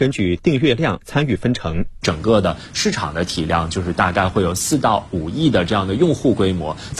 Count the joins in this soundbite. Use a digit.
0